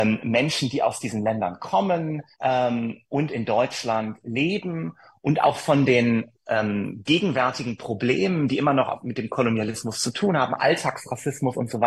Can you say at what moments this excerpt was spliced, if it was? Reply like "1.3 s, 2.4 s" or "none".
2.3 s